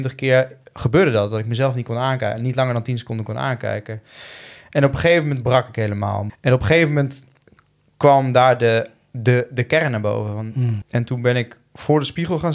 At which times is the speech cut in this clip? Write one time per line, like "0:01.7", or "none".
0:06.3
0:10.8